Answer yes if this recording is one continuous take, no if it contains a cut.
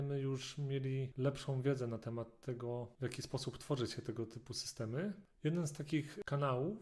yes